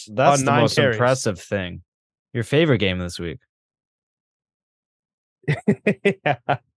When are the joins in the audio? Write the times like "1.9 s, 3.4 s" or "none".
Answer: 2.1 s

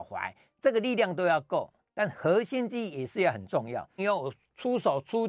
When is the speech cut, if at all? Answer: 4.0 s

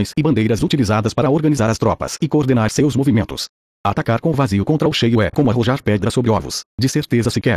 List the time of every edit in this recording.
3.7 s

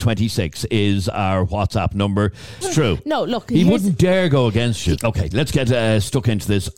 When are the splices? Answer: 2.6 s, 5.0 s

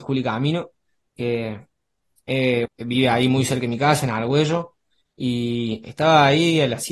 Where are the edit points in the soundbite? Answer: 2.7 s

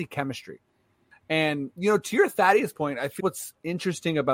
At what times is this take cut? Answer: 1.1 s, 3.2 s

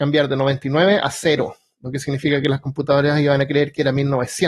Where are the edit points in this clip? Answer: none

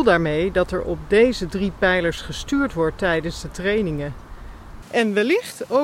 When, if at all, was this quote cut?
4.8 s

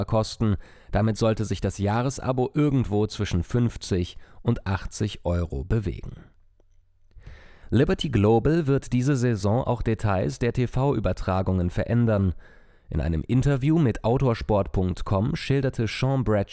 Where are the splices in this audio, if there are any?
7.6 s

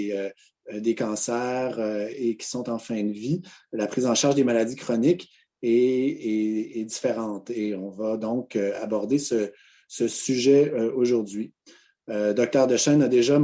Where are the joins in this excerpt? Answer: none

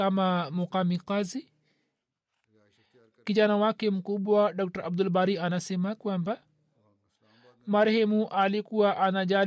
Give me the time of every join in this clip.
none

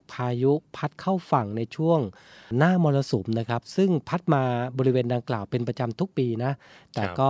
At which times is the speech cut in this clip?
none

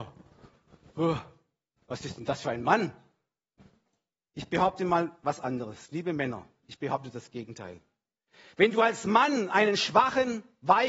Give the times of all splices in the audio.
none

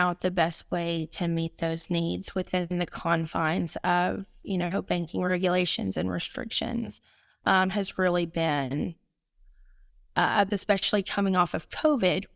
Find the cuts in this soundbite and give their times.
10.5 s

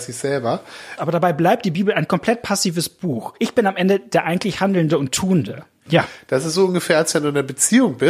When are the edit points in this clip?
1.0 s, 5.9 s

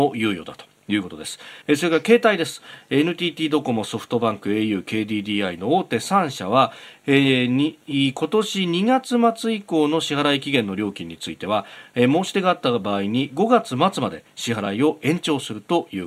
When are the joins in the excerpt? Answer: 1.6 s

